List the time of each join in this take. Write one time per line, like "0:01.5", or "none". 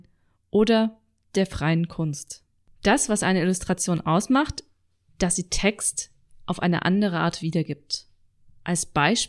0:05.1